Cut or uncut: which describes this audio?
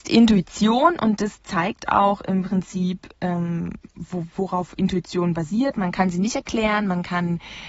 uncut